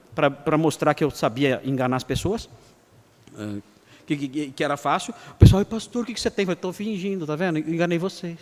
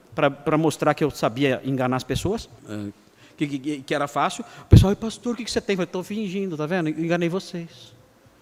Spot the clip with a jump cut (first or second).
second